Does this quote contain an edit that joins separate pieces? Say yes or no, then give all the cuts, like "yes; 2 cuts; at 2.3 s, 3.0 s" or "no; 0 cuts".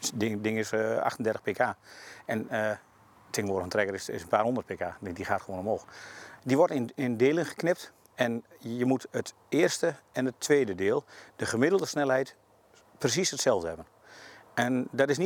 yes; 2 cuts; at 6.4 s, 8.1 s